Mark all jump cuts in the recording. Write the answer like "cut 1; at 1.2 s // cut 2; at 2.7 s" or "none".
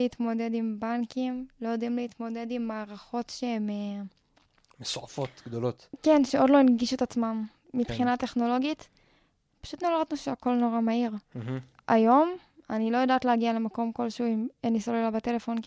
none